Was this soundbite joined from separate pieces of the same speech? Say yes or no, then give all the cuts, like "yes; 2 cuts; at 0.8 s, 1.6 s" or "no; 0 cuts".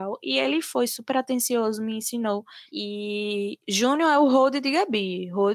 yes; 1 cut; at 2.7 s